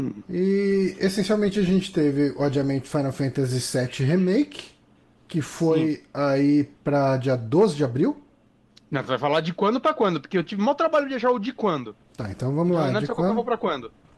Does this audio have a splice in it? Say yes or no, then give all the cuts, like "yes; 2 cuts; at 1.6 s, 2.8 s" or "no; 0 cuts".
no; 0 cuts